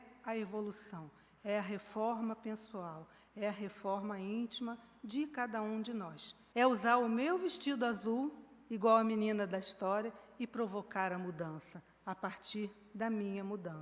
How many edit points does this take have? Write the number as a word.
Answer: one